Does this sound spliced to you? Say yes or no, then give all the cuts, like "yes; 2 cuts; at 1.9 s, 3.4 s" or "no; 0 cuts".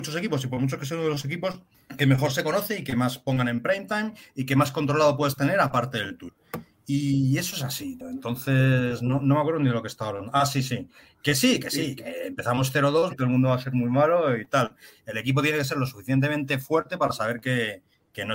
yes; 1 cut; at 13.1 s